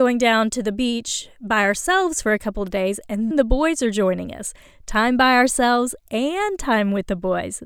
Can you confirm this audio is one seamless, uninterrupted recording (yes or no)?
no